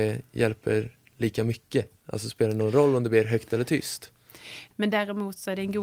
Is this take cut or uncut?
cut